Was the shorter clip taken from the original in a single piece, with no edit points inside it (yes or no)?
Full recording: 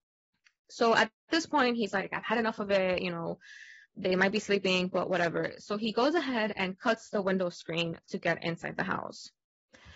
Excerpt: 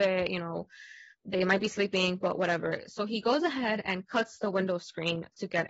yes